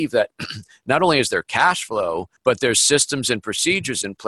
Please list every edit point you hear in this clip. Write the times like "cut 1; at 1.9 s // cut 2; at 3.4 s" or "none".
cut 1; at 2.4 s